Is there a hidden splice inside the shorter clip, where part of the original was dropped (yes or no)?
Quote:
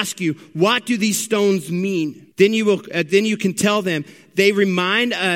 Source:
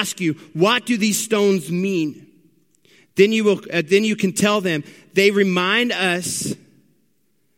yes